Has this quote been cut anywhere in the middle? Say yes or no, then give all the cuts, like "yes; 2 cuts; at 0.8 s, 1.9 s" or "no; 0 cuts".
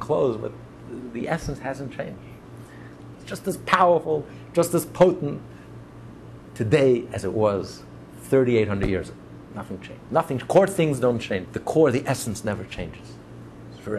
yes; 2 cuts; at 3.1 s, 11.5 s